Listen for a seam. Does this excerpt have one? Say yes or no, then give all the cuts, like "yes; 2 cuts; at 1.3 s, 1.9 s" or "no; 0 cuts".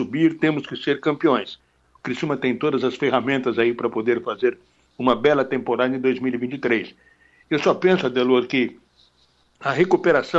yes; 1 cut; at 1.8 s